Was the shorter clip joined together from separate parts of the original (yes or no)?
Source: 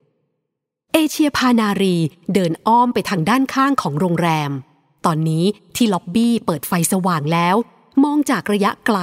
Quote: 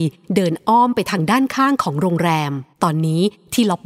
yes